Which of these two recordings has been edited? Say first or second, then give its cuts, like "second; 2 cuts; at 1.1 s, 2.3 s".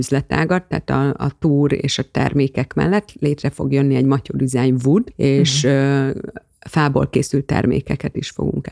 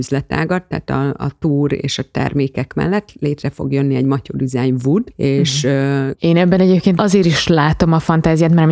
second; 1 cut; at 6.1 s